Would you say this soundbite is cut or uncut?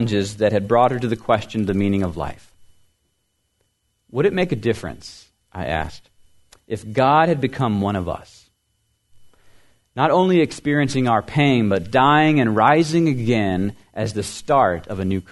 uncut